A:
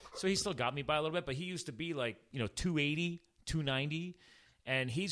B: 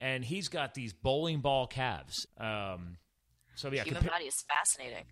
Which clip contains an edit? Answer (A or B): B